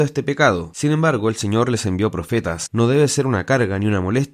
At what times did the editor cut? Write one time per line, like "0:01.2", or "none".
0:02.7